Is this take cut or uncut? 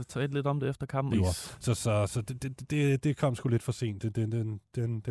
cut